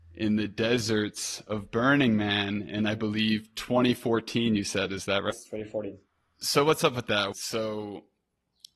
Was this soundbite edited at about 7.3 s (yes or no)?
yes